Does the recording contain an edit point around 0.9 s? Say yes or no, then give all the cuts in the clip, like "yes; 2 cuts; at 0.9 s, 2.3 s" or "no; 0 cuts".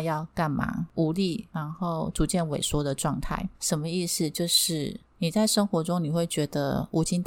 no; 1 cut; at 3.5 s